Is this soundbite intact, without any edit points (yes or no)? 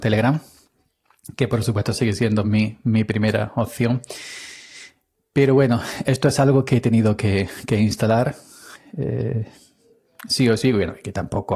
yes